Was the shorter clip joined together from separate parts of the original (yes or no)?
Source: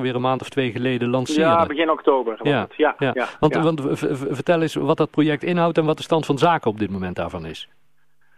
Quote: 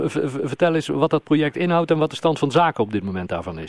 no